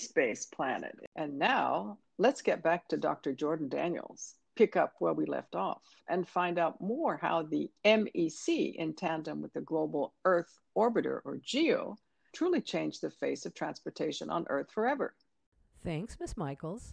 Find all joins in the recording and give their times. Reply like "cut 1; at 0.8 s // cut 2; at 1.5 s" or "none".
cut 1; at 12.3 s